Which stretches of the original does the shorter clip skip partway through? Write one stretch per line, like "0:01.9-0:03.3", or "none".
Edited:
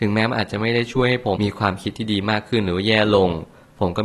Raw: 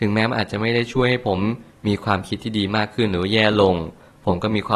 0:01.4-0:01.8